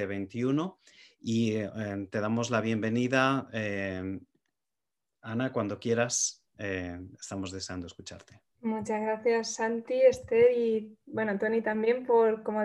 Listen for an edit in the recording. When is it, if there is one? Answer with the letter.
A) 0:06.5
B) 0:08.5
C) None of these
B